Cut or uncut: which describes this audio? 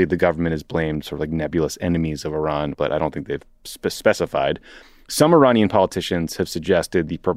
cut